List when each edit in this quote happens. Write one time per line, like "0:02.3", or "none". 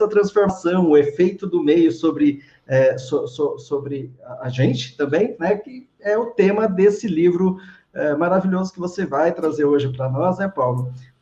none